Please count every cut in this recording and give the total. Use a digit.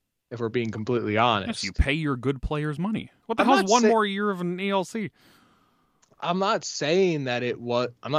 1